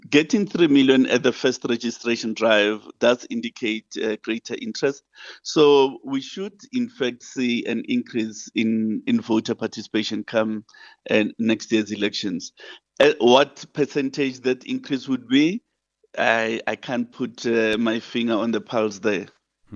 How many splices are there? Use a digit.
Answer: 0